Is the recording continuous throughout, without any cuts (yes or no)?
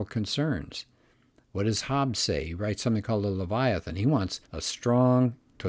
no